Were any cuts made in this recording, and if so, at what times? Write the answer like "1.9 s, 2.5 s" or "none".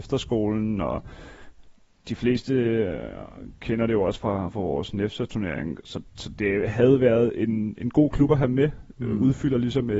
none